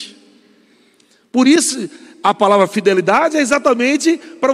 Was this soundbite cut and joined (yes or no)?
no